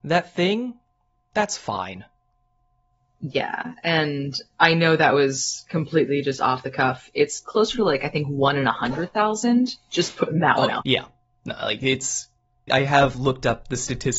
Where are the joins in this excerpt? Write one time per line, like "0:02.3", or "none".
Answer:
0:10.8
0:12.7